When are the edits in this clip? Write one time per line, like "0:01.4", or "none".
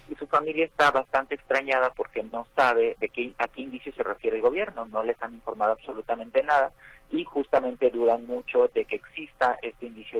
0:03.0